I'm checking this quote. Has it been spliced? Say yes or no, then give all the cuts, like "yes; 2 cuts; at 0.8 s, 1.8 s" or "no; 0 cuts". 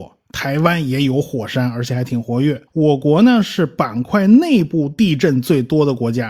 yes; 1 cut; at 2.7 s